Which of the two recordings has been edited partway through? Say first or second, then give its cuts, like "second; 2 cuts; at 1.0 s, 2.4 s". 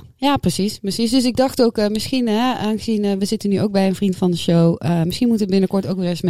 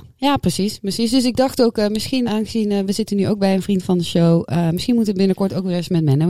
second; 1 cut; at 2.3 s